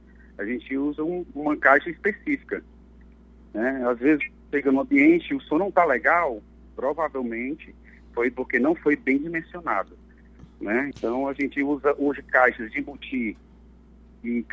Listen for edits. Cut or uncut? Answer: cut